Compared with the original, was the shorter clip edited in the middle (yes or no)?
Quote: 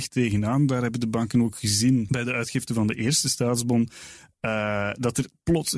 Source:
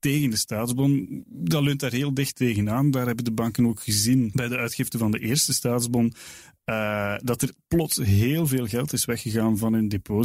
no